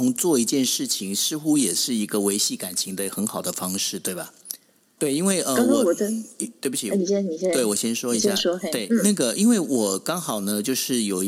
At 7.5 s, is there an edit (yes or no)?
no